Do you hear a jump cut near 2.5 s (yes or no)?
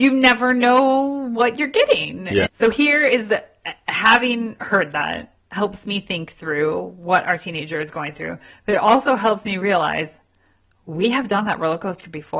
yes